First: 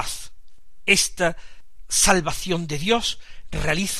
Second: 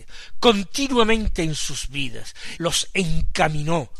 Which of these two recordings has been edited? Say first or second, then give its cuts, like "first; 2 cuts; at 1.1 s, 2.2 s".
second; 1 cut; at 2.6 s